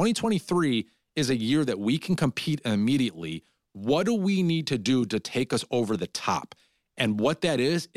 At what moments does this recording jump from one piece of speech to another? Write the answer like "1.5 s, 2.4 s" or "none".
none